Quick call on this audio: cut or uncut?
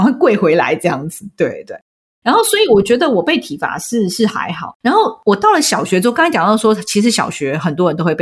uncut